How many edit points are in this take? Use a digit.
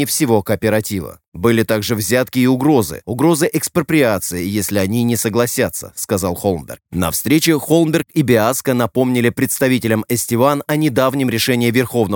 0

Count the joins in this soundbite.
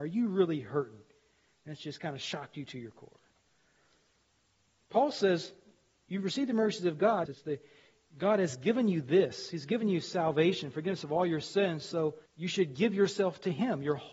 2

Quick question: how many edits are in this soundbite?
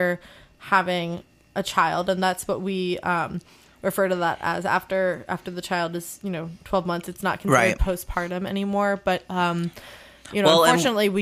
0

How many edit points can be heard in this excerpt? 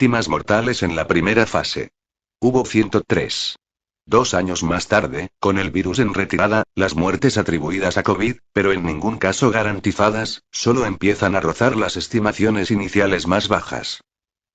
0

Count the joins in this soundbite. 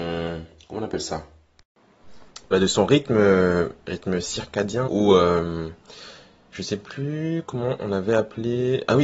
1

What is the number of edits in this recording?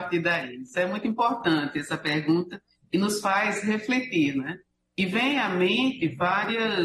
0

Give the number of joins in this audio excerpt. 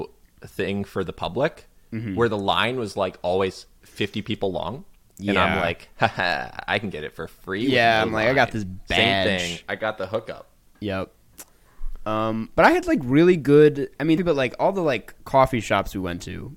1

